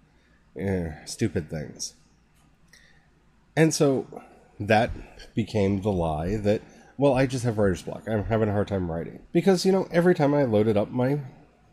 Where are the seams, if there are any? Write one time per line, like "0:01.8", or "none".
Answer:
0:01.0
0:09.2